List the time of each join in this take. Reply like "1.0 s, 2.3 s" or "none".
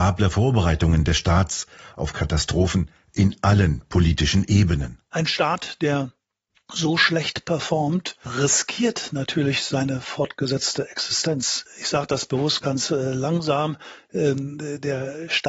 12.6 s